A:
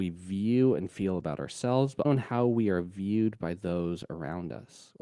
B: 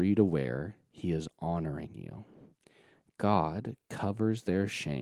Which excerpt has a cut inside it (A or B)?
A